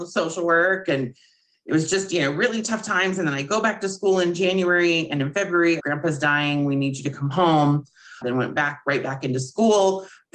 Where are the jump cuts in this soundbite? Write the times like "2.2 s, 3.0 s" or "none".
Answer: 5.8 s, 8.2 s